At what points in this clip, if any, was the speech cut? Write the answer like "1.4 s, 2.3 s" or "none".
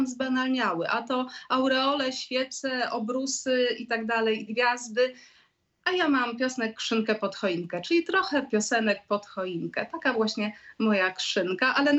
4.5 s

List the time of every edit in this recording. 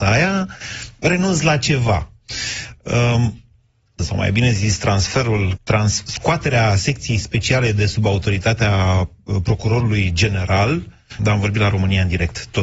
4.0 s, 5.6 s, 11.2 s

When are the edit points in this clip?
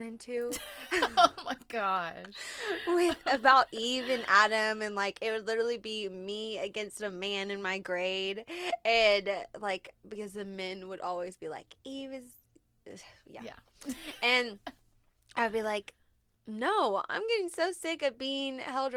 none

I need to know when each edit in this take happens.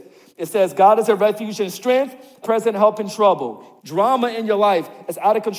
2.4 s, 3.8 s

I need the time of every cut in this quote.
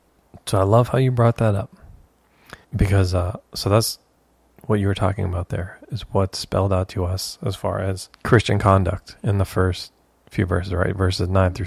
2.6 s, 8.1 s

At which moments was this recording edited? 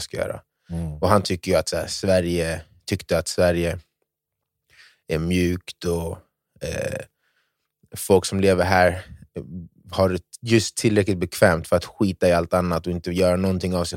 none

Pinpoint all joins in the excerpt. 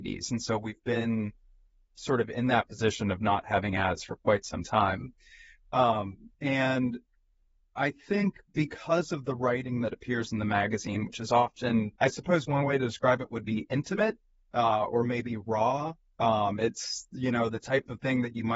6.3 s, 12.0 s

